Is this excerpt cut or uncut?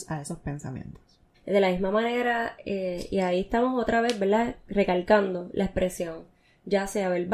cut